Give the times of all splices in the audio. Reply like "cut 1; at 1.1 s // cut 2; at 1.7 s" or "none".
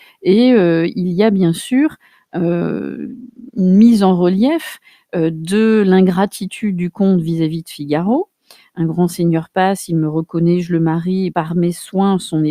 cut 1; at 11.3 s